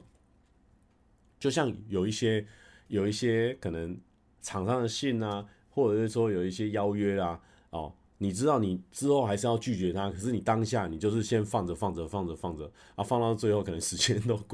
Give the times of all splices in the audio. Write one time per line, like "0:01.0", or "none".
none

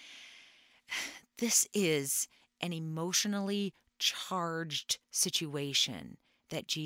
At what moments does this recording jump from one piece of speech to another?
0:05.0

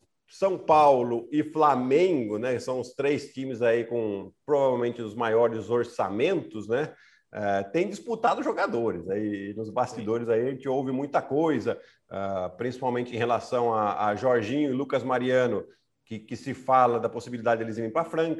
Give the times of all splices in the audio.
none

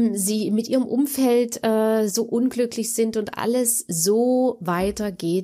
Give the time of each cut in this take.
none

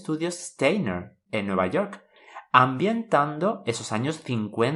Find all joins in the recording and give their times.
0:01.3

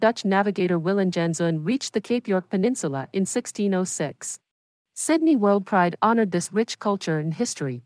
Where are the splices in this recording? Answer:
0:04.8

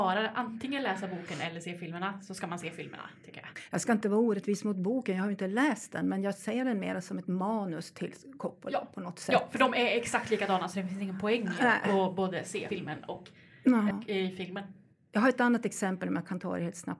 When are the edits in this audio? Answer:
0:13.9

